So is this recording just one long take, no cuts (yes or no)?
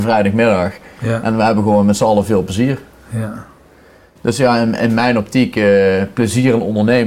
yes